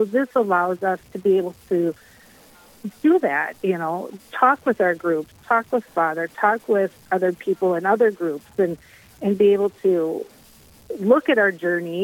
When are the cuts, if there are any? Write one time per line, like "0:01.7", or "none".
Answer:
none